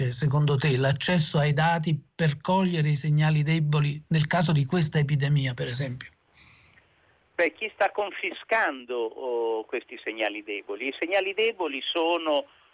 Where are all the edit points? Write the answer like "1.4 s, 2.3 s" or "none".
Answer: none